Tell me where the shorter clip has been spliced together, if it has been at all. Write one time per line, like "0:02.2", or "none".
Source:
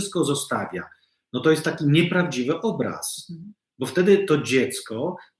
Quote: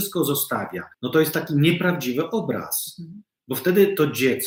0:00.9